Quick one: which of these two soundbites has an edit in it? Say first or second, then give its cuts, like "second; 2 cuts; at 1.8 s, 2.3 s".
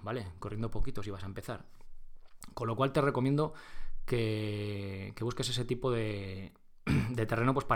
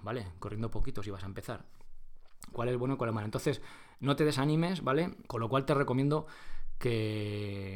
second; 2 cuts; at 2.5 s, 5.3 s